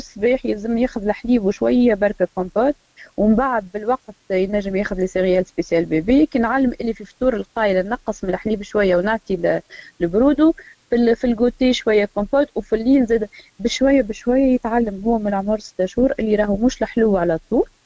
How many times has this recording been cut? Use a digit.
0